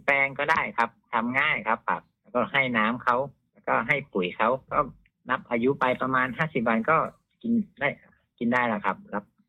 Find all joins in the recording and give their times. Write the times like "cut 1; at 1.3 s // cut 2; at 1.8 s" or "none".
none